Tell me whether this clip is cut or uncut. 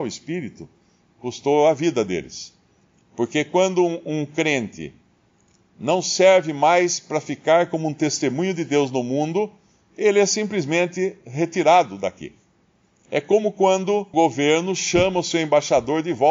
cut